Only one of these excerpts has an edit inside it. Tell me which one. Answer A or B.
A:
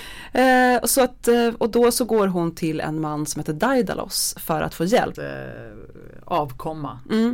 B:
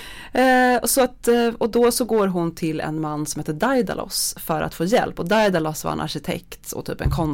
A